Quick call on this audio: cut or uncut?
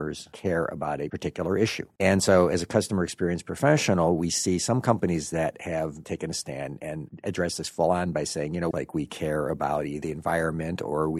cut